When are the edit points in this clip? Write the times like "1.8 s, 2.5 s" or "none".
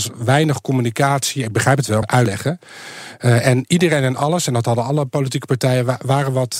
2.0 s